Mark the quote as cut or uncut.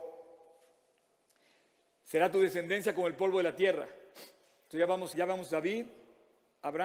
cut